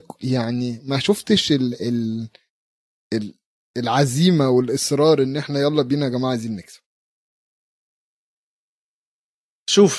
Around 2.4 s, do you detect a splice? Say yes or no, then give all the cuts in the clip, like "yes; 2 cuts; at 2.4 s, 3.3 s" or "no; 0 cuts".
no; 0 cuts